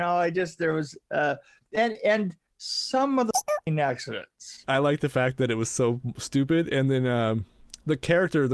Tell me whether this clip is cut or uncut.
cut